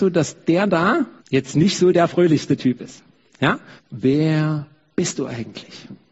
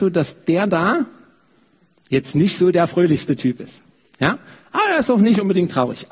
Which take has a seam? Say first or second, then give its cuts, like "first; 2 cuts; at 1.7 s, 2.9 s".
first; 2 cuts; at 1.2 s, 3.8 s